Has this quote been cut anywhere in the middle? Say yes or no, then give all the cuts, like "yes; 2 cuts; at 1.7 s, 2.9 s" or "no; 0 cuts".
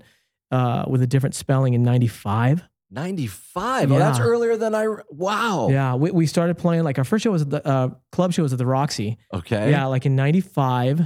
no; 0 cuts